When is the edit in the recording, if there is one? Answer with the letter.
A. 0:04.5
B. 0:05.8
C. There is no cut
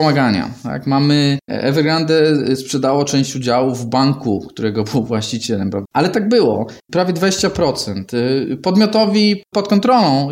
B